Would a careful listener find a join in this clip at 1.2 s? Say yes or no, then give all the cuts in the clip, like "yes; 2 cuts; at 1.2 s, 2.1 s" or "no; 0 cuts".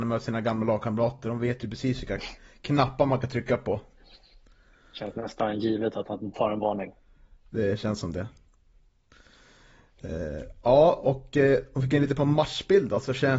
no; 0 cuts